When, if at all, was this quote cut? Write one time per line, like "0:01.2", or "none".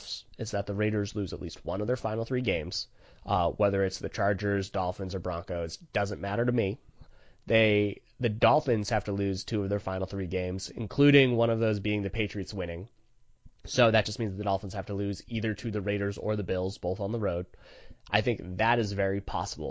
none